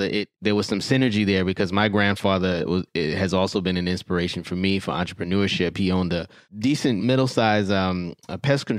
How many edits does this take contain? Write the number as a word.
one